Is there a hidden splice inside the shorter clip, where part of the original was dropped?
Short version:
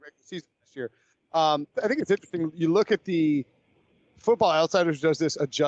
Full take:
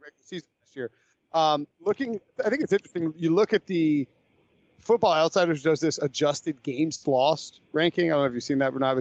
yes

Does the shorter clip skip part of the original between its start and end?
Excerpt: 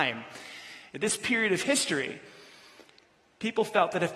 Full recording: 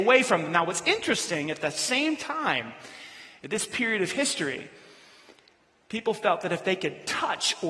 no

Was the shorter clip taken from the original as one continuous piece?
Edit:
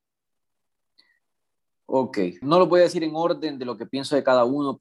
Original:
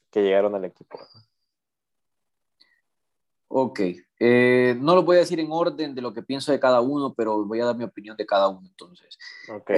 no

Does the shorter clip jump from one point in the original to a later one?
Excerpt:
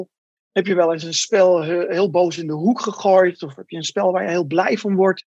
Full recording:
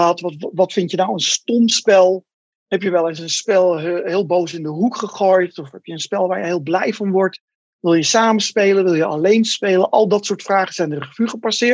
no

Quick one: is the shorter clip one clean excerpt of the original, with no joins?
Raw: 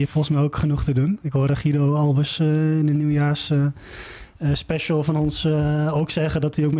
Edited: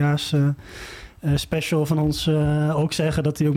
yes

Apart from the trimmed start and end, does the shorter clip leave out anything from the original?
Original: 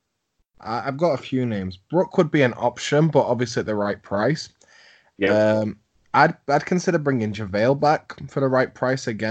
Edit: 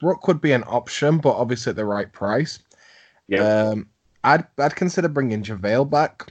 no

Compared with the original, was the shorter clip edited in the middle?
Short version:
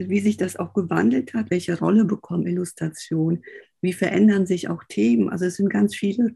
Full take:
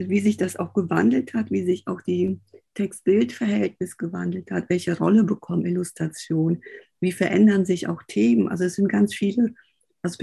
yes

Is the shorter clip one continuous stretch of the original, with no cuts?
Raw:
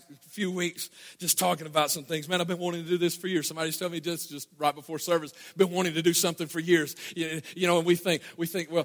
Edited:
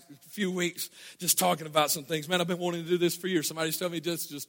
yes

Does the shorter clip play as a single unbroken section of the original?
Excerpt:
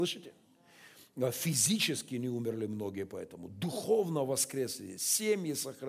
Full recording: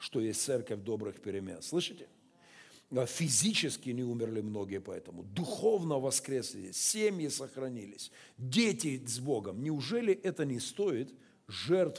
yes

